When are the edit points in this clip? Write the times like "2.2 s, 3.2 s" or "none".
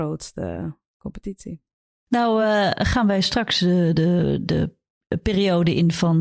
none

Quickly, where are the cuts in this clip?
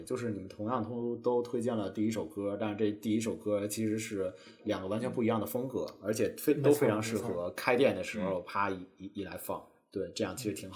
none

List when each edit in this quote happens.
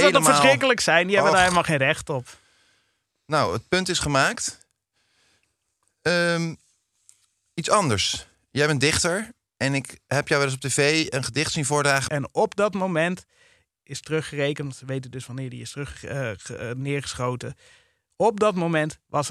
12.1 s

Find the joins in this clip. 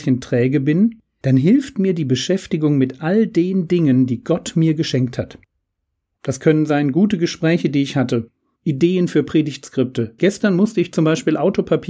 6.2 s, 8.6 s, 10.2 s

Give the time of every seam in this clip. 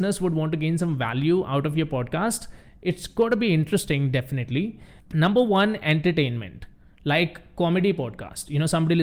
5.0 s

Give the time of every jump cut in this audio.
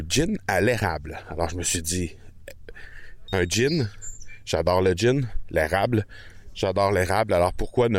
3.3 s

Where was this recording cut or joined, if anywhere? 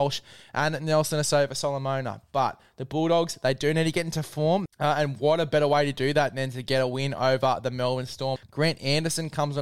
4.7 s, 8.4 s

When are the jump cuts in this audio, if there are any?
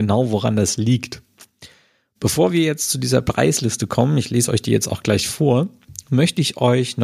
none

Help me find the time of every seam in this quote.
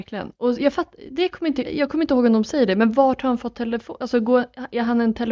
1.6 s

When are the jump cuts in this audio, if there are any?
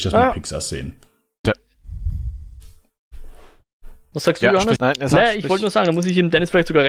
1.4 s, 4.8 s

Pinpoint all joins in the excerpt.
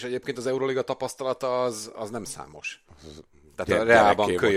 2.9 s

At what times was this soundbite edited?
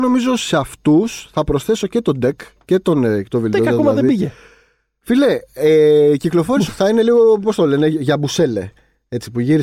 6.7 s

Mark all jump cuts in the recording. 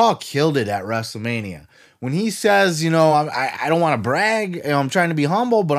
none

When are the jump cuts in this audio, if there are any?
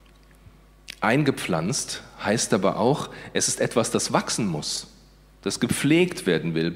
none

